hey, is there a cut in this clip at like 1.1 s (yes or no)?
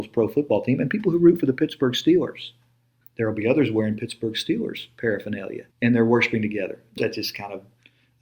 no